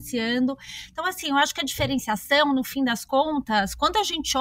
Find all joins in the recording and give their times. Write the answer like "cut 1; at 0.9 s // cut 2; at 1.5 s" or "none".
none

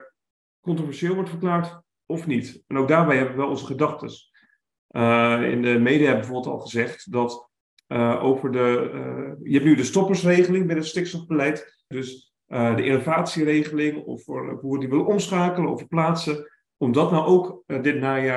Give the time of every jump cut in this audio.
cut 1; at 11.9 s

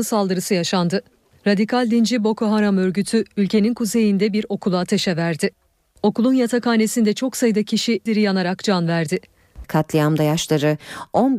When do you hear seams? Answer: cut 1; at 8.1 s // cut 2; at 9.6 s

